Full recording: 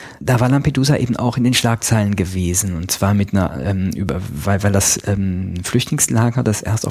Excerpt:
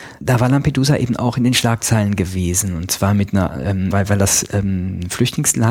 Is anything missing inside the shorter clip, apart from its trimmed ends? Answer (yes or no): yes